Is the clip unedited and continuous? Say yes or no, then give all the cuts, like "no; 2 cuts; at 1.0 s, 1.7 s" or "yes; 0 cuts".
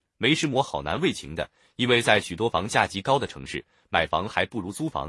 yes; 0 cuts